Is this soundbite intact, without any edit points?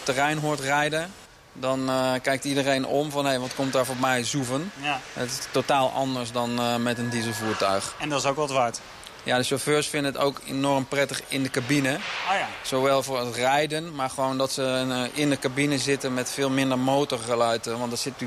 yes; 0 cuts

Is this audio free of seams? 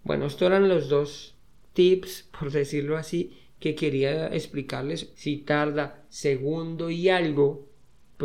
no; 1 cut; at 5.1 s

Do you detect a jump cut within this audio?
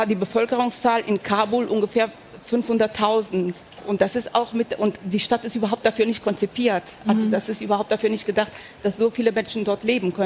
yes; 1 cut; at 3.8 s

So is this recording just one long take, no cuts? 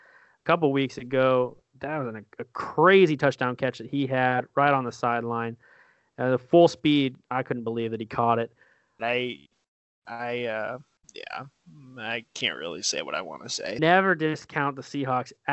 no; 2 cuts; at 9.0 s, 13.8 s

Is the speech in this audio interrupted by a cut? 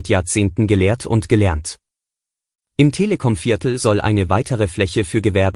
yes; 1 cut; at 2.6 s

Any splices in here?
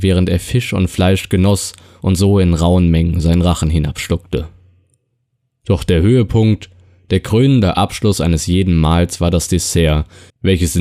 no; 0 cuts

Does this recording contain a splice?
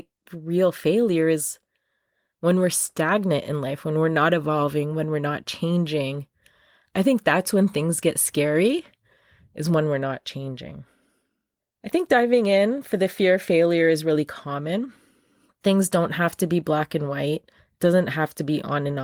no; 0 cuts

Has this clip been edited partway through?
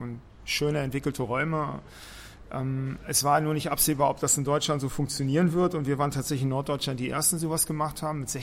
no; 0 cuts

